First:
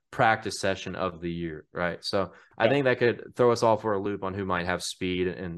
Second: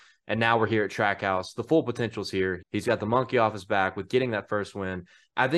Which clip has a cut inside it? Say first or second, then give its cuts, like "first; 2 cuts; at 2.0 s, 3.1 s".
second; 1 cut; at 2.6 s